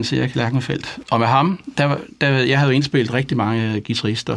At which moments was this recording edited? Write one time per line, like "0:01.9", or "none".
0:01.0